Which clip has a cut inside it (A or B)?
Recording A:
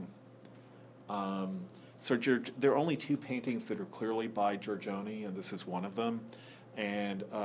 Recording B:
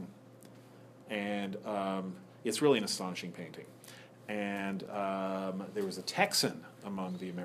B